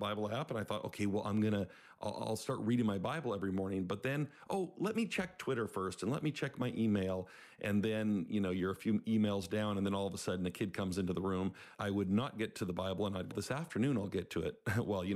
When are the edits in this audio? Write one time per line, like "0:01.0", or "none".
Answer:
0:11.7
0:13.3